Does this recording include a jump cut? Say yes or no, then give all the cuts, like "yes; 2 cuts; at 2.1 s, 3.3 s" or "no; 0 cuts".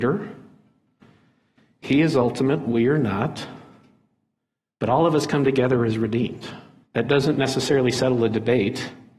yes; 1 cut; at 6.8 s